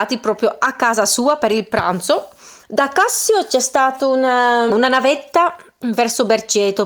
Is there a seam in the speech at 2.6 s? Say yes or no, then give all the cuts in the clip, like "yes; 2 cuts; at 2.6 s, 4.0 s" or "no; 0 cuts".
yes; 2 cuts; at 2.6 s, 4.7 s